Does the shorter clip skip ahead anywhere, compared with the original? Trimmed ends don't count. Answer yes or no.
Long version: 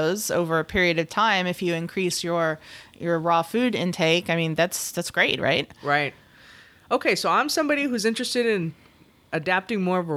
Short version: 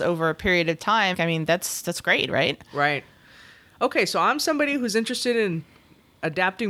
yes